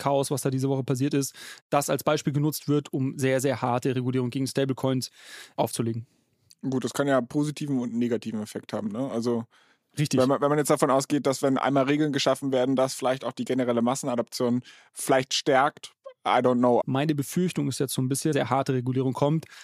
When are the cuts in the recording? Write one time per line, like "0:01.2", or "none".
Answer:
0:16.8
0:18.3